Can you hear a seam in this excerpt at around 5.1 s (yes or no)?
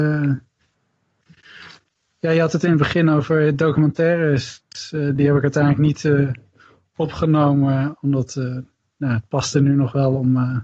no